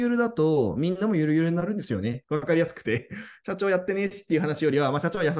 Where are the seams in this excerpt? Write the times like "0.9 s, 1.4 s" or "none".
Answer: 2.2 s